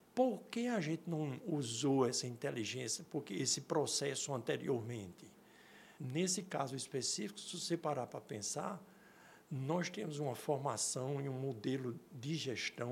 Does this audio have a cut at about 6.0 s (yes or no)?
yes